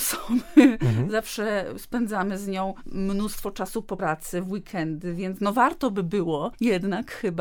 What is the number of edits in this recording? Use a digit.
1